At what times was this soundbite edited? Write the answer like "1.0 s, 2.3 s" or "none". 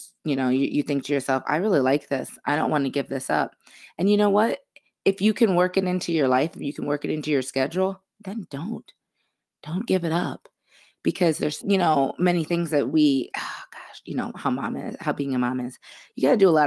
11.6 s, 13.3 s